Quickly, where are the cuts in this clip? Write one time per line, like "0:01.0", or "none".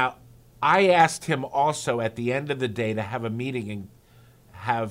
none